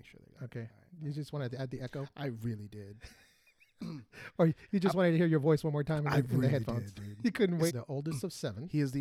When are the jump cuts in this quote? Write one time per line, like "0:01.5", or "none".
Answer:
0:07.7